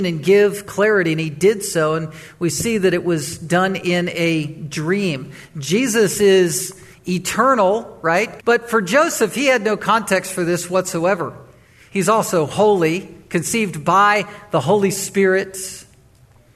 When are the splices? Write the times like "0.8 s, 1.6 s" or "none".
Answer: 8.4 s, 11.9 s